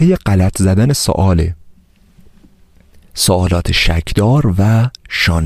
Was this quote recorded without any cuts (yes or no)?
yes